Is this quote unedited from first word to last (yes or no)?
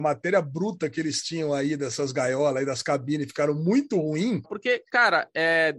no